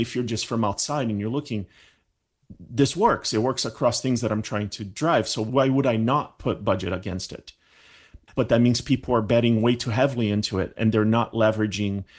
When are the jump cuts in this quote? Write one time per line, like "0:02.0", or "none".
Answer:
0:08.3